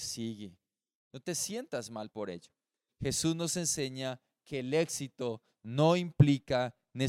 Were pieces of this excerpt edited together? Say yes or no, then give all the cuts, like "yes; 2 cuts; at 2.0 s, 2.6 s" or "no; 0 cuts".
yes; 1 cut; at 2.9 s